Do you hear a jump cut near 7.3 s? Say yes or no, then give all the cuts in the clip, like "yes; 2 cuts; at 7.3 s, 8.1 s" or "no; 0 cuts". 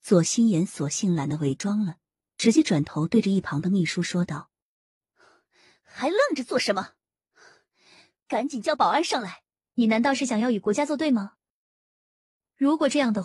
no; 1 cut; at 9.6 s